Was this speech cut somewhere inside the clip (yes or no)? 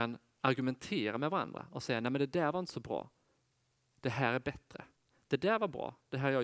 no